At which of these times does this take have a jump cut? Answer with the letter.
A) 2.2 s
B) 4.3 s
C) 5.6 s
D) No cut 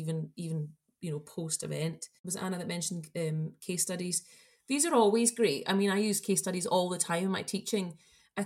D